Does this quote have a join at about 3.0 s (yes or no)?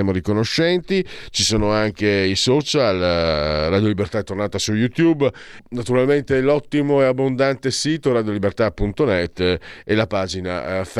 no